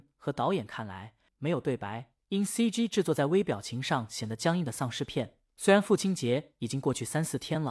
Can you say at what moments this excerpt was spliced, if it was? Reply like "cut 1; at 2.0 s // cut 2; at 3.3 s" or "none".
cut 1; at 1.3 s